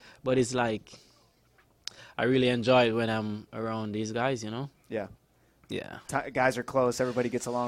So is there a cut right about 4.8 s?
no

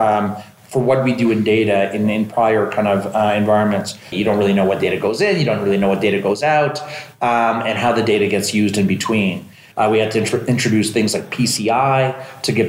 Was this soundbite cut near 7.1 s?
no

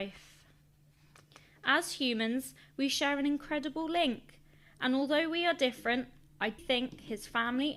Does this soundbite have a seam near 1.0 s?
no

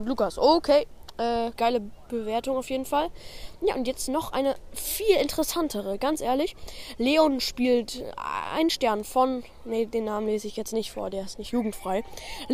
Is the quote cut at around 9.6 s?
no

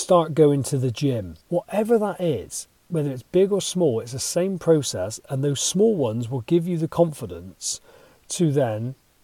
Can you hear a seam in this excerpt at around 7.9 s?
no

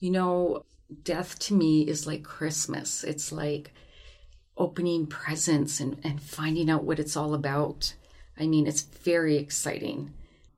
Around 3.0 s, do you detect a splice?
no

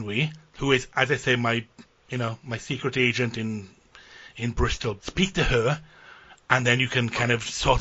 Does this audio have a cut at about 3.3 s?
no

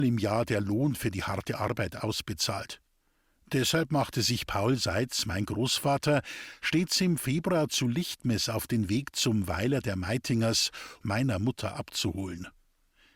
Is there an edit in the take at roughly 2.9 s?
no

